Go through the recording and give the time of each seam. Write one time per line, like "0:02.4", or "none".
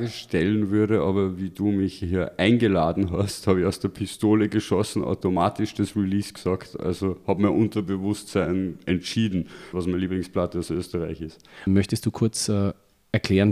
0:09.7
0:11.7